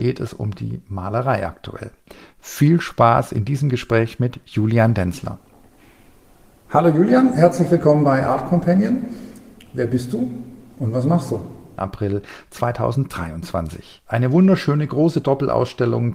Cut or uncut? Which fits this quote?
cut